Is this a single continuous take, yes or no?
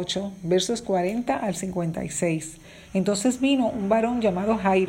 no